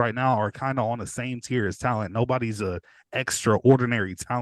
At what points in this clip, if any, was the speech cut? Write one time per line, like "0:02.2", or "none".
none